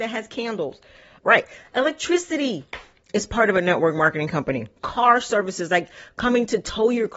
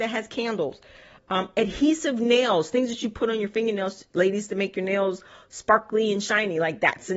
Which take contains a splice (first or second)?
first